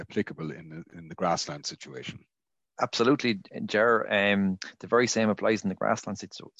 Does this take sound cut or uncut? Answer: uncut